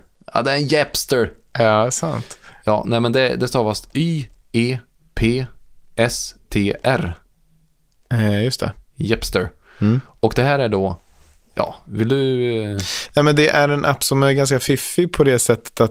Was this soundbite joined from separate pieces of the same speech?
no; 0 cuts

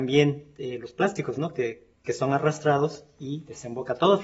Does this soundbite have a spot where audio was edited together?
no; 0 cuts

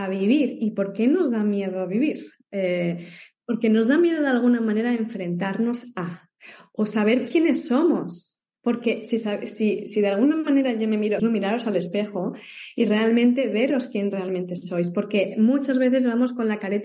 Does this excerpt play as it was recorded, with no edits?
no; 1 cut; at 11.2 s

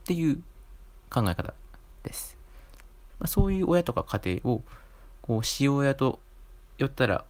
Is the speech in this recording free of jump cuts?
no; 1 cut; at 3.1 s

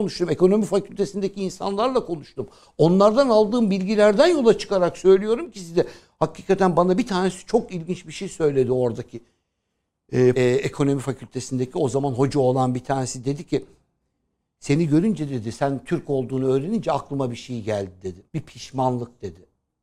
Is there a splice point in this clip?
yes; 2 cuts; at 10.4 s, 18.3 s

